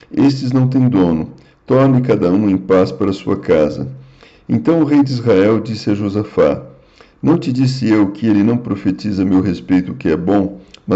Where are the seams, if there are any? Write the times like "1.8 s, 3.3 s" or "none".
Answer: none

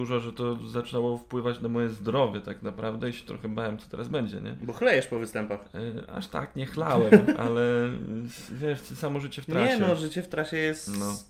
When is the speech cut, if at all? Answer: none

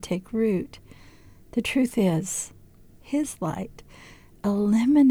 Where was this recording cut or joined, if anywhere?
2.9 s

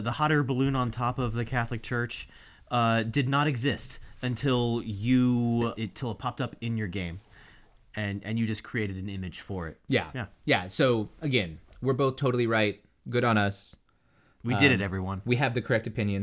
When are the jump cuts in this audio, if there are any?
none

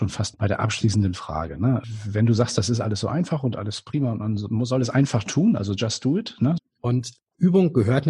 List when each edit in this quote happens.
6.6 s

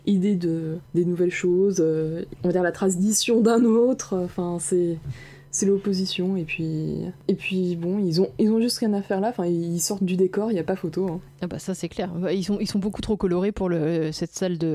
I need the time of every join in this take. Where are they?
none

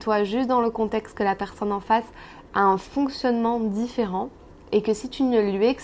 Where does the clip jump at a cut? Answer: none

